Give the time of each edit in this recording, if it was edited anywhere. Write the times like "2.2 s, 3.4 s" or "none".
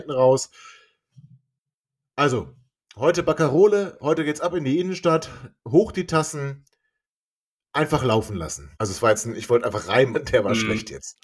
8.7 s, 10.1 s